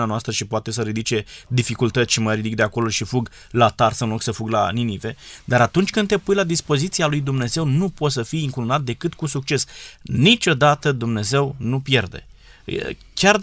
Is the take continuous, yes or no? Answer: yes